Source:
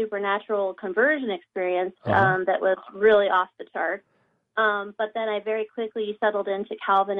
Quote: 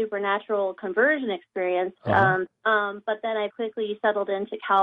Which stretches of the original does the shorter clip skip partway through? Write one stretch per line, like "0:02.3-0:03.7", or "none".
0:02.5-0:04.4
0:05.4-0:05.7